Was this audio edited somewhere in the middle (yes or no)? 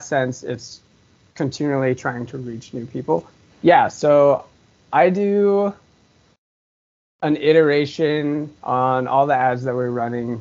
yes